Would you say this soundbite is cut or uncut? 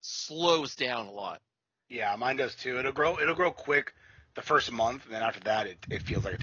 uncut